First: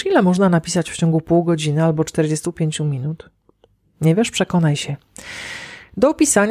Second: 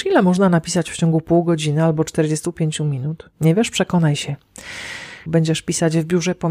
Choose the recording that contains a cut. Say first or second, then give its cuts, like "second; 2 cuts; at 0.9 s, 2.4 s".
second; 2 cuts; at 3.3 s, 5.3 s